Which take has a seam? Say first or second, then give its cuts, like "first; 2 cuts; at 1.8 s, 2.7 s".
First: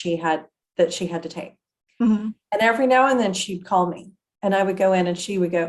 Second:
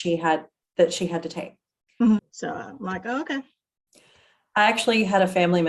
second; 1 cut; at 2.2 s